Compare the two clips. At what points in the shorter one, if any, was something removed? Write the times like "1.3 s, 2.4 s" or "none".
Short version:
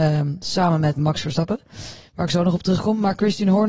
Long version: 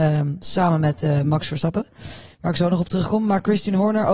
1.0 s